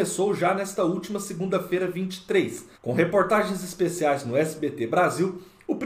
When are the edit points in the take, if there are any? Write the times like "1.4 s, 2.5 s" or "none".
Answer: 2.7 s